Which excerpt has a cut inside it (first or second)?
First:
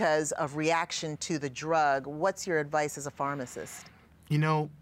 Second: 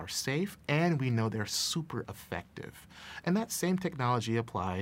second